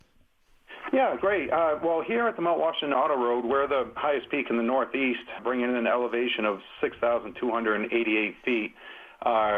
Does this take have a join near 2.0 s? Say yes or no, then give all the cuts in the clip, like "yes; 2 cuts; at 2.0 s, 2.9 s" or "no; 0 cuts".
no; 1 cut; at 5.4 s